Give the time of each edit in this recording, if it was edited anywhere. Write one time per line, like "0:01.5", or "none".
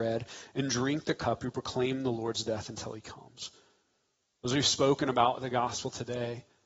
none

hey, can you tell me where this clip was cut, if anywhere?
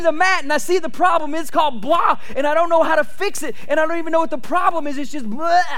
none

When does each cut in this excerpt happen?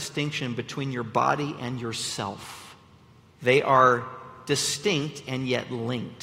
0:03.4

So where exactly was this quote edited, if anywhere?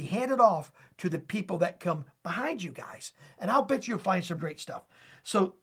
0:04.3

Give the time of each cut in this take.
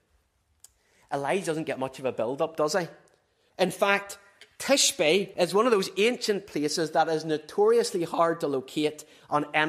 0:03.5
0:05.3

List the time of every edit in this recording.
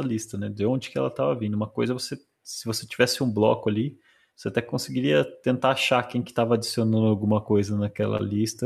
none

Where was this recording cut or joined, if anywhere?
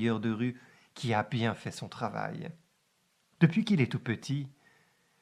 0:03.3

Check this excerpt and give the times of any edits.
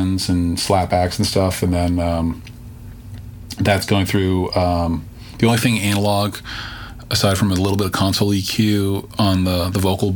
none

